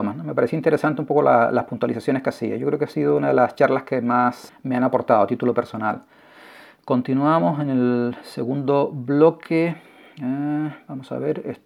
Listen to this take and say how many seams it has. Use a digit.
1